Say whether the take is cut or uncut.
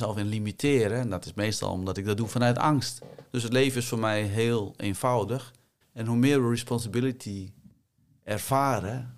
cut